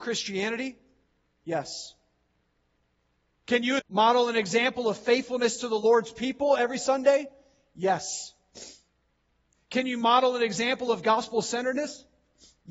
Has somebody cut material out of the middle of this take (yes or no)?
yes